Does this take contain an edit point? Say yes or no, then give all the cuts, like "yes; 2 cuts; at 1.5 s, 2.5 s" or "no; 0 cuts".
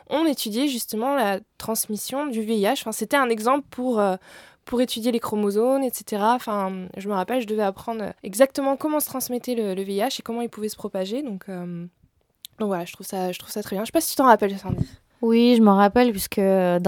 yes; 1 cut; at 8.2 s